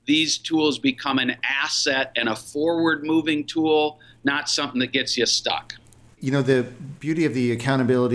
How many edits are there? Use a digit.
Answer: 0